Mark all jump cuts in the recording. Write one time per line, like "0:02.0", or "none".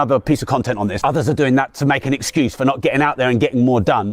0:01.0